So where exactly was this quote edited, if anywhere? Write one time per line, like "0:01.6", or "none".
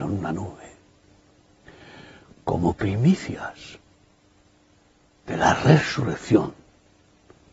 none